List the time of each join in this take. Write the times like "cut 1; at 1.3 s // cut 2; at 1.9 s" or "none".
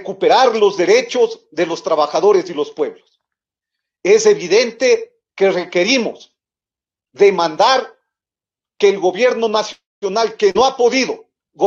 cut 1; at 5.3 s